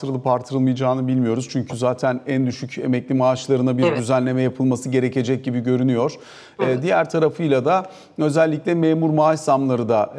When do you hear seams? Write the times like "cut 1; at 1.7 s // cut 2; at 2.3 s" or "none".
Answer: none